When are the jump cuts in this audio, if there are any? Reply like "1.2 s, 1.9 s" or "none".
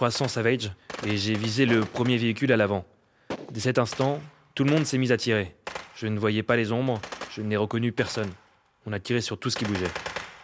none